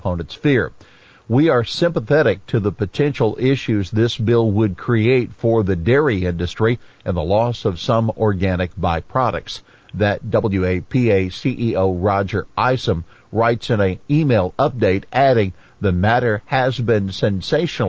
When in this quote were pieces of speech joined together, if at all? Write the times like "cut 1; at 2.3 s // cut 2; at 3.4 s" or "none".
none